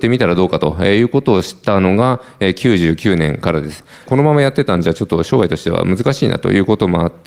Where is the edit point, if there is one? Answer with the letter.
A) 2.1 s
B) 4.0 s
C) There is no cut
B